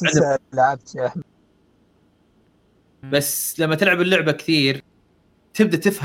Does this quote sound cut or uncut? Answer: cut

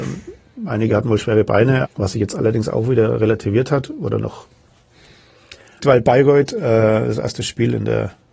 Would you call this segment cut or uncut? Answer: cut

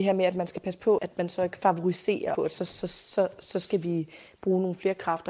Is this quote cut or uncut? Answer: cut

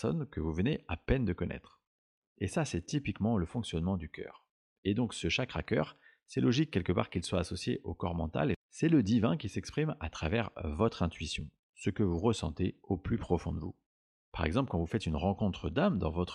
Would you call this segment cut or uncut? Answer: cut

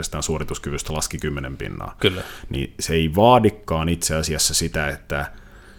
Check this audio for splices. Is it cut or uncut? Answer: uncut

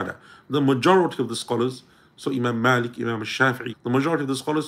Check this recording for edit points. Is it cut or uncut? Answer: cut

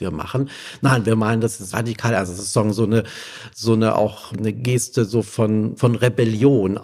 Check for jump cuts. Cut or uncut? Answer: cut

